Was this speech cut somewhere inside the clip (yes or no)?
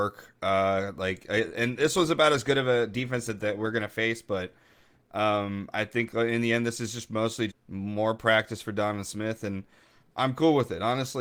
yes